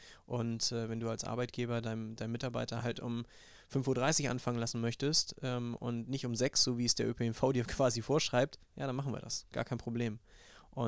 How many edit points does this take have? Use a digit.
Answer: 0